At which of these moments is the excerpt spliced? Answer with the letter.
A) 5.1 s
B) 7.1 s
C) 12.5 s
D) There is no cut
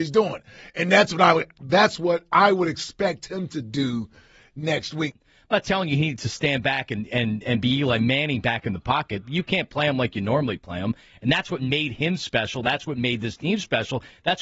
A